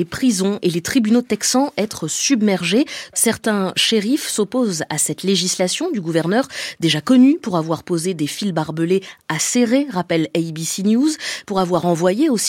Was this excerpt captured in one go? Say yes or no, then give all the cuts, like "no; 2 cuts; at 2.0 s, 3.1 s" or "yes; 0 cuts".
no; 1 cut; at 3.1 s